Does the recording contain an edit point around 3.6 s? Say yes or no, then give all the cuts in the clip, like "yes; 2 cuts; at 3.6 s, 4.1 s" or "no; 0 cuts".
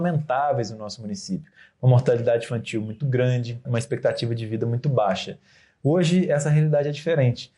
yes; 1 cut; at 3.6 s